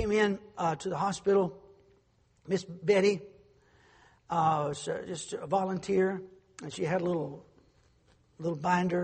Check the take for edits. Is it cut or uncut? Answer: uncut